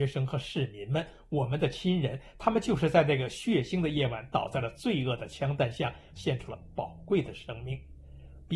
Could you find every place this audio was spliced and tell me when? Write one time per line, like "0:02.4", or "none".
0:06.1